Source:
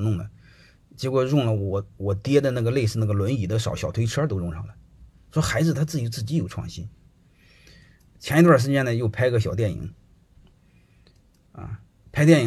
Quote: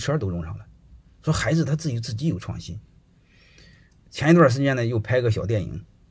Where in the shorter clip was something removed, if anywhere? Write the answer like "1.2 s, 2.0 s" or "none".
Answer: none